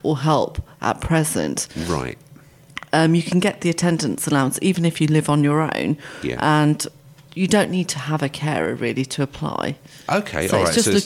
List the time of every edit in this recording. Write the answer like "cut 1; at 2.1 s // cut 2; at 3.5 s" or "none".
cut 1; at 7.3 s